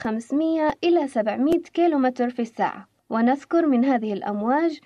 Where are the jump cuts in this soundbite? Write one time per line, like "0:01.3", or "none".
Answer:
0:03.0